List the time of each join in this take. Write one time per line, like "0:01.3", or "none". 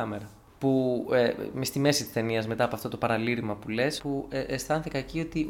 0:04.0